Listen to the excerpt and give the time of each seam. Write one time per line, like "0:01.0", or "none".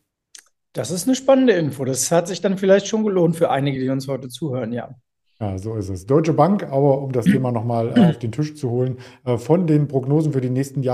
none